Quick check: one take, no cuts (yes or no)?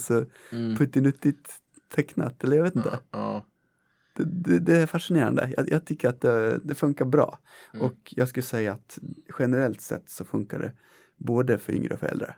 yes